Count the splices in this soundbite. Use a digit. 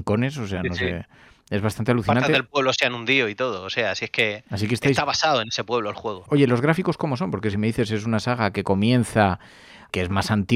1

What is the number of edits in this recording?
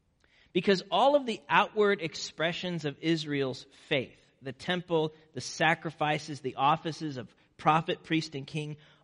0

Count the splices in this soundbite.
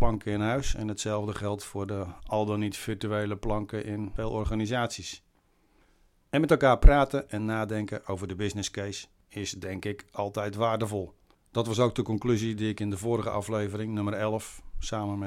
1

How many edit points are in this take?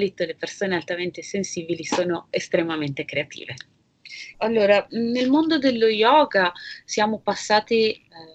1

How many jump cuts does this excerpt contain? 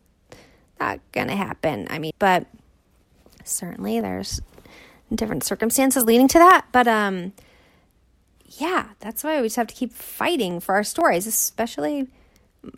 1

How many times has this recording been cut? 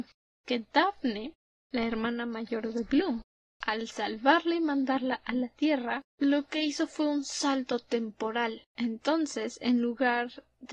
1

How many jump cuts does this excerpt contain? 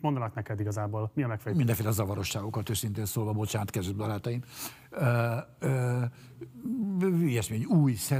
0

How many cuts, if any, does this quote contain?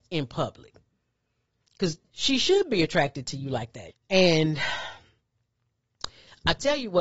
1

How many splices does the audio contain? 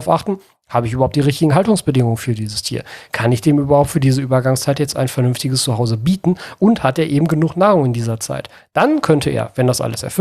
0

